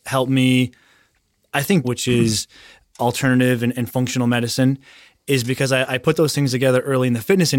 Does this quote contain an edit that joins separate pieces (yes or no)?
yes